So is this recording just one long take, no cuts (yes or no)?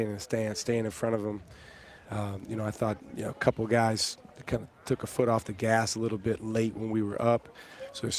no